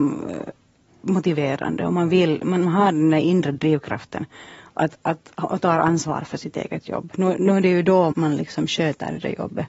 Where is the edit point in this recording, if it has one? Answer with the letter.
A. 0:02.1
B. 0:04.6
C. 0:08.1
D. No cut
C